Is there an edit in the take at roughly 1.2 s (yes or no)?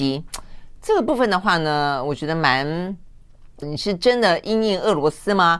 no